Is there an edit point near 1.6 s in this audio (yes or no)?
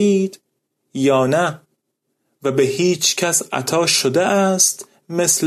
no